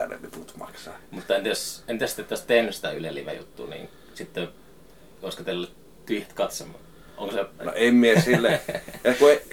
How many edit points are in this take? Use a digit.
1